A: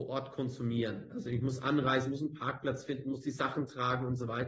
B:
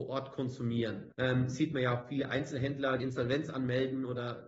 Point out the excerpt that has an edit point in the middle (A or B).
B